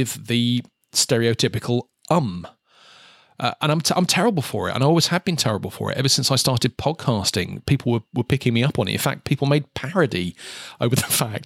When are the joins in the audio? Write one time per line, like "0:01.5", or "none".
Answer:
none

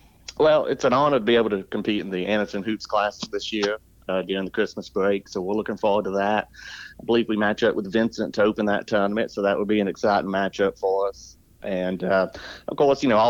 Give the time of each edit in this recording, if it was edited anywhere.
0:11.6

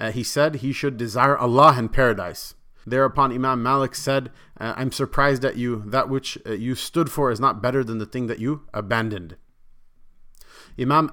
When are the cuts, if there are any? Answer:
0:02.8

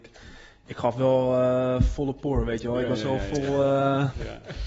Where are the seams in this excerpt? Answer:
none

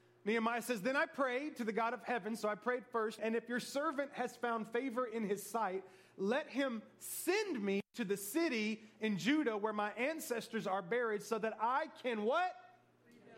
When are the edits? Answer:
0:03.2

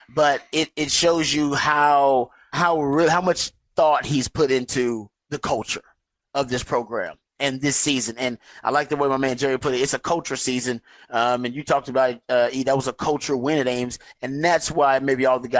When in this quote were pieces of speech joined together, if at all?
0:02.5

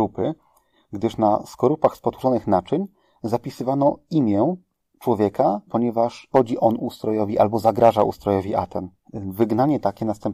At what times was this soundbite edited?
0:05.7

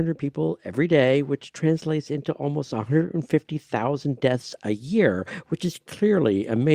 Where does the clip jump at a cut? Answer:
none

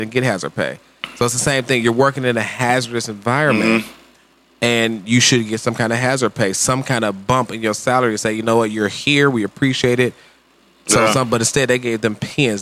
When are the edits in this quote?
none

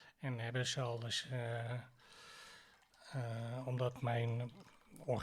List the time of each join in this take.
none

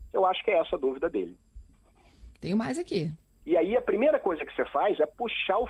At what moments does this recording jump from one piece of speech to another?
0:03.4

